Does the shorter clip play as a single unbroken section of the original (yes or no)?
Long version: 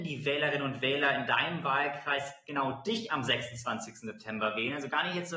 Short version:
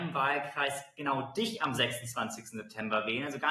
yes